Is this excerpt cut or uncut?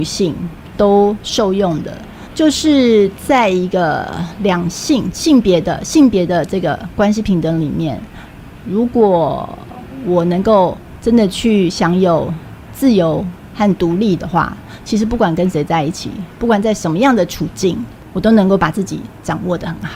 uncut